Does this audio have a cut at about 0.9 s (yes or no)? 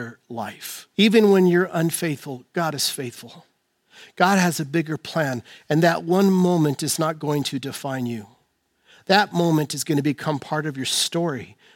yes